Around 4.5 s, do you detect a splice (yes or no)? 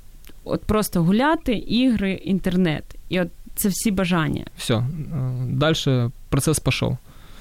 yes